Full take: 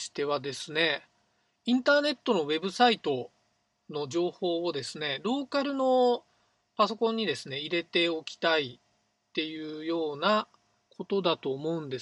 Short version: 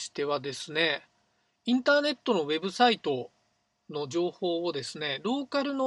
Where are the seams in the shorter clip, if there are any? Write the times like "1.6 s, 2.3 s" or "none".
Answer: none